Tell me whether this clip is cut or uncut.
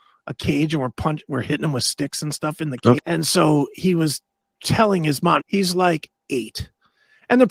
cut